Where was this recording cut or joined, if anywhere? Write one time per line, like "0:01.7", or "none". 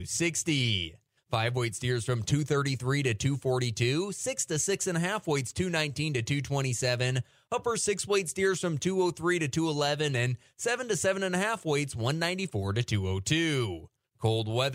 0:01.2